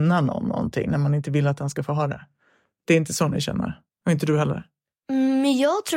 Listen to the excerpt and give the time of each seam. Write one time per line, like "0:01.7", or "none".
0:03.9

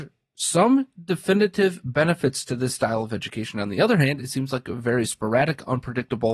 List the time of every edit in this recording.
none

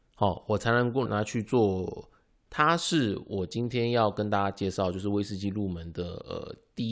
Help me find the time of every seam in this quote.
0:01.1
0:02.5

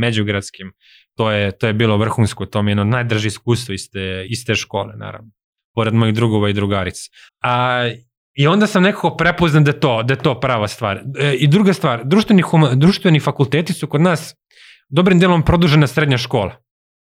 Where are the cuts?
0:04.3
0:07.3

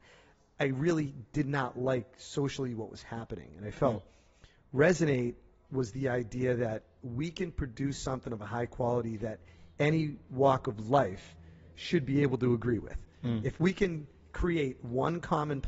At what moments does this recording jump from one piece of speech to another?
none

